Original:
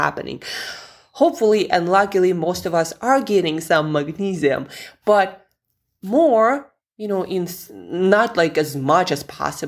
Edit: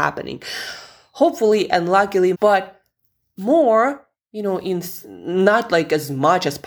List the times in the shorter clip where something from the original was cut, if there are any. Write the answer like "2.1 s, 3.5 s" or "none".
2.3 s